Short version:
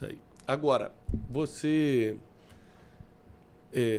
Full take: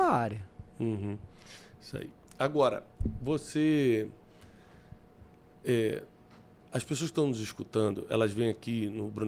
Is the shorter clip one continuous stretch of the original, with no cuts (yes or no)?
yes